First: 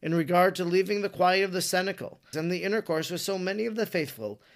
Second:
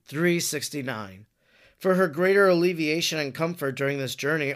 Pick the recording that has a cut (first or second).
first